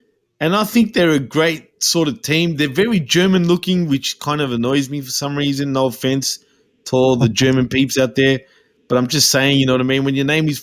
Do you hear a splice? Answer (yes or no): no